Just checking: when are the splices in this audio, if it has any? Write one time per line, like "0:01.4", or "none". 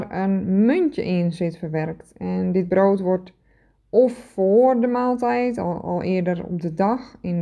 none